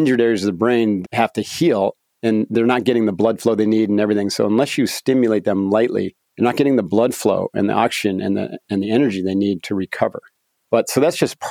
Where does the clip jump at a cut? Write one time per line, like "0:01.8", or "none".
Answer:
0:01.0